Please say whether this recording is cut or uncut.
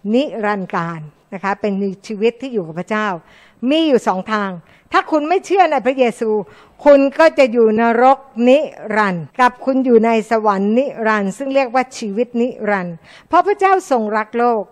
cut